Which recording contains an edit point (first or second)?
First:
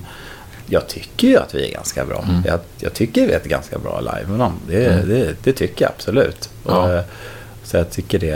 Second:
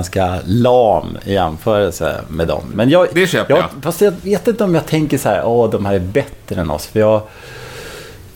second